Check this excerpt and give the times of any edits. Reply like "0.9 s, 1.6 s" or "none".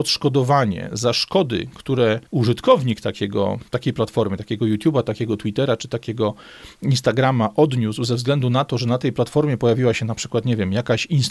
2.3 s